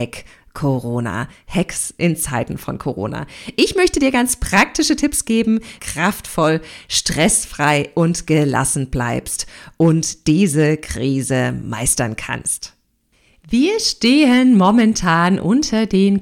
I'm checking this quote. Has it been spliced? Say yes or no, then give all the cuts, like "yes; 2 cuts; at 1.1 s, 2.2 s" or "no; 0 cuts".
yes; 1 cut; at 5.8 s